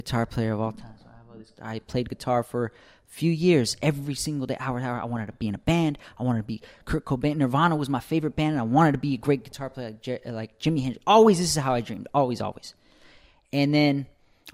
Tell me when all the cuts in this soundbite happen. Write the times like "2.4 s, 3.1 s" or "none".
none

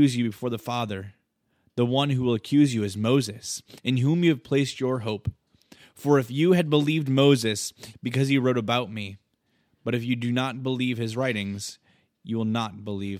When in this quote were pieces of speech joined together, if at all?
7.9 s

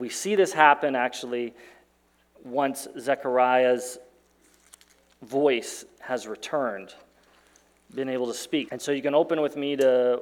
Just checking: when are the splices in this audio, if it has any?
8.7 s

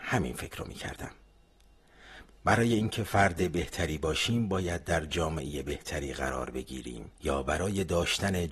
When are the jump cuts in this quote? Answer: 2.3 s, 7.2 s

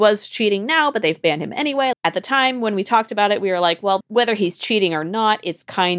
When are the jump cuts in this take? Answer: 1.9 s, 4.0 s

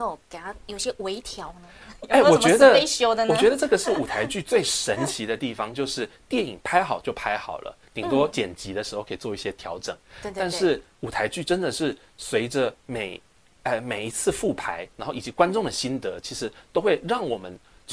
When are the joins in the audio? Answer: none

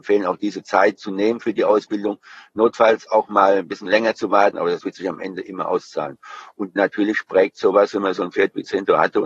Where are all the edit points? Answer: 4.5 s

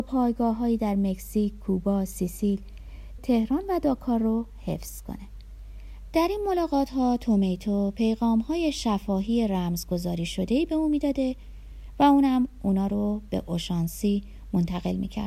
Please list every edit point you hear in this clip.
3.2 s, 6.1 s

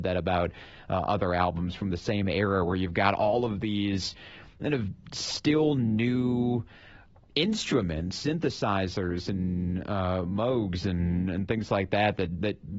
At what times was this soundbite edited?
none

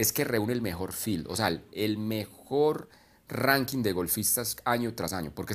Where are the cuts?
none

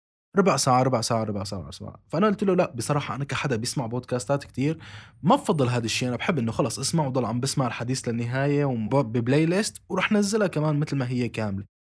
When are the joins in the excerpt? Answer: 8.9 s

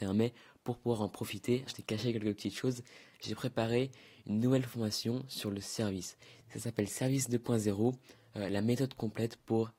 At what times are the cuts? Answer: 1.7 s

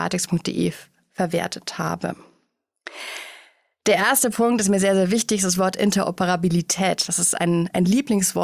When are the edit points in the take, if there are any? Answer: none

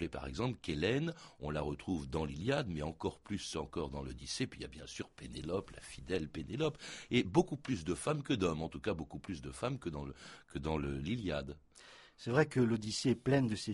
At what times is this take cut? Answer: none

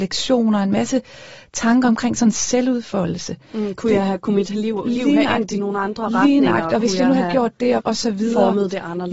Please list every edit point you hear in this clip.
7.8 s

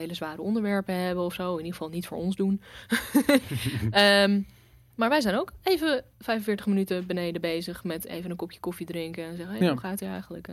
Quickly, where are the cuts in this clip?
none

